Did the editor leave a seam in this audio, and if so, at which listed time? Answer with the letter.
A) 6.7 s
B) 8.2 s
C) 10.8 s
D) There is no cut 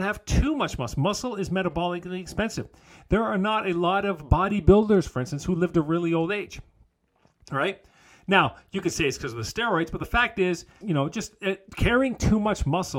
C